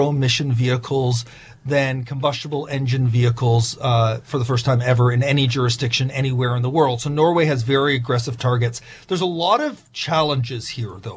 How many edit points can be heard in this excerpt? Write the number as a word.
zero